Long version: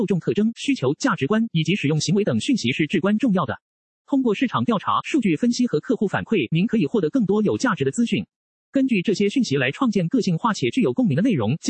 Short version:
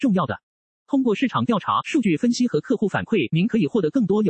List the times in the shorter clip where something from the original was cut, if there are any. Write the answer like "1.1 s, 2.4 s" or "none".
none